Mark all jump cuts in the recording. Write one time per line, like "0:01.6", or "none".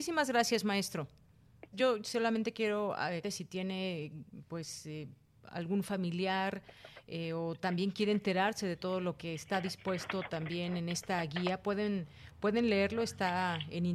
0:01.7
0:03.2